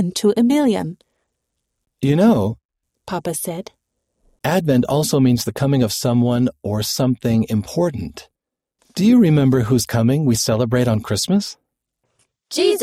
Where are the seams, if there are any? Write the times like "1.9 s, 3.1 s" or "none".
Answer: none